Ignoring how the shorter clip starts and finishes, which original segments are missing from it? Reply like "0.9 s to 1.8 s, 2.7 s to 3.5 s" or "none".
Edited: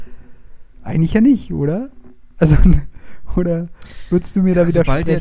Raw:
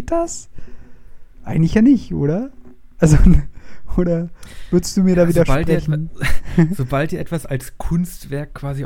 none